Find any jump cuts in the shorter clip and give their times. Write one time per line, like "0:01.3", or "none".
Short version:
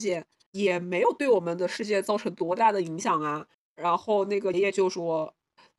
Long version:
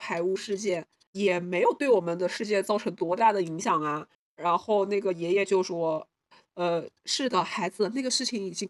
0:04.5